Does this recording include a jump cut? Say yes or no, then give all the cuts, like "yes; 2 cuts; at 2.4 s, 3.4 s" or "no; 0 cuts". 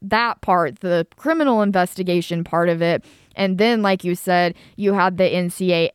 no; 0 cuts